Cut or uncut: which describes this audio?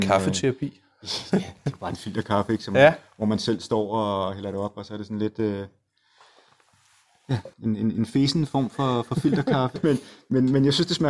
cut